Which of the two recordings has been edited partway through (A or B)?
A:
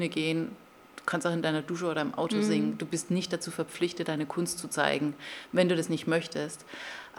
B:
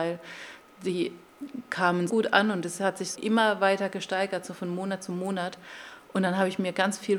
B